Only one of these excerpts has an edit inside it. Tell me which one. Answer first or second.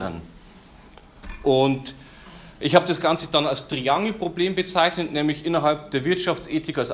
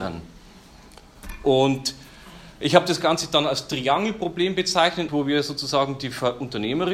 second